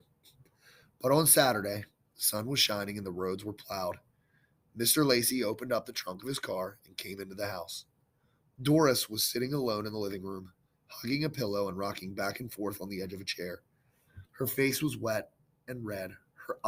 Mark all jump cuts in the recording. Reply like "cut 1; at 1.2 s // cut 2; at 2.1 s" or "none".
cut 1; at 2.1 s // cut 2; at 14.3 s